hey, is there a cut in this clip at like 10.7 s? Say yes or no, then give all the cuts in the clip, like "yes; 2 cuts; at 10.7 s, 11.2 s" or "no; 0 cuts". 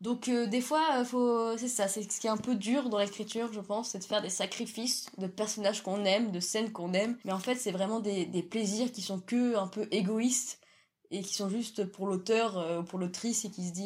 no; 0 cuts